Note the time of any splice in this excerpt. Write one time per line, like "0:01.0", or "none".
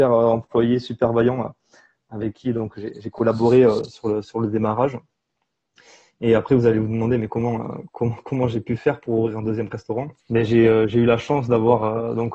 0:10.2